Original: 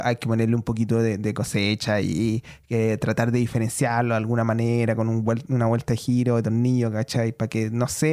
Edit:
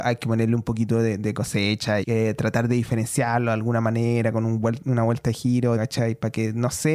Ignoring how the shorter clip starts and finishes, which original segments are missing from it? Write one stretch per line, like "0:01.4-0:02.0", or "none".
0:02.0-0:02.6
0:06.4-0:06.9

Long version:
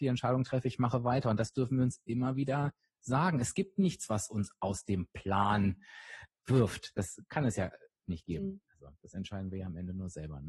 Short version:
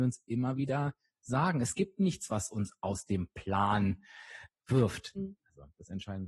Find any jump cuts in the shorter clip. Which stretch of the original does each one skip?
0:06.9-0:08.4

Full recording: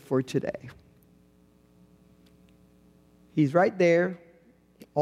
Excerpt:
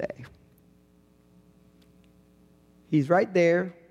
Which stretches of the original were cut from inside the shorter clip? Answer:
none

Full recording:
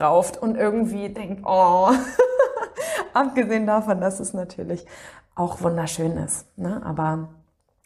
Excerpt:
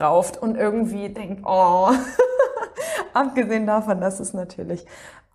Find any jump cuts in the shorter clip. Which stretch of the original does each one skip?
none

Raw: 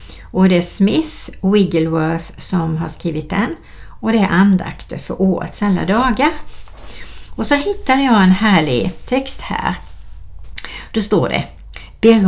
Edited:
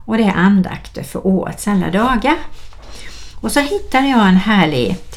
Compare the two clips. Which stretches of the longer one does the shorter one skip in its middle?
none

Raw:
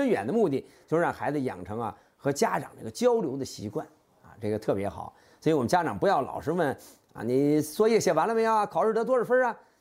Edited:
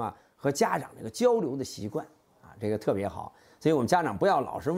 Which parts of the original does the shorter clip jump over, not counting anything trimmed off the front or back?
none

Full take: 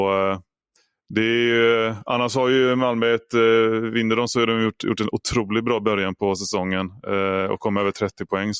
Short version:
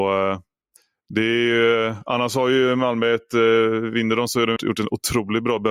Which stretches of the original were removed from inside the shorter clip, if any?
0:04.6-0:04.8

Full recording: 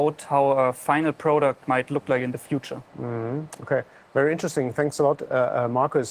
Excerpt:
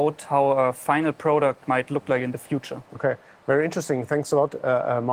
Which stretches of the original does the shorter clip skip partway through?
0:02.9-0:03.6

